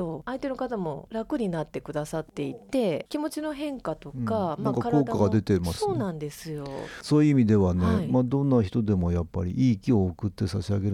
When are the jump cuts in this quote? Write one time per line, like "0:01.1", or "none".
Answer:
none